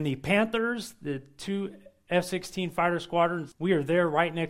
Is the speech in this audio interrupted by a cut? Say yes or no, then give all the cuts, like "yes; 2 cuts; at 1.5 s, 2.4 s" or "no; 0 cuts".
yes; 1 cut; at 3.5 s